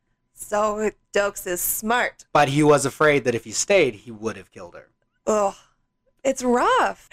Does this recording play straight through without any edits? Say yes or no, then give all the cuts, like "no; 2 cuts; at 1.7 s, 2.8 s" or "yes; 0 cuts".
no; 1 cut; at 2.3 s